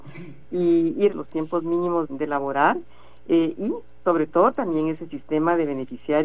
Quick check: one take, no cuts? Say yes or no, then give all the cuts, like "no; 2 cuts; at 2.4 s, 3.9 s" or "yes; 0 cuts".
no; 2 cuts; at 1.1 s, 2.1 s